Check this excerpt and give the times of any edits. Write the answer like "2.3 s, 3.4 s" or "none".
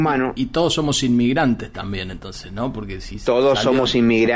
none